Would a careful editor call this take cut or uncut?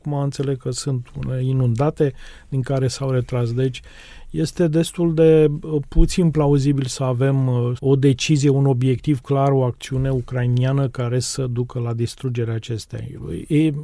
cut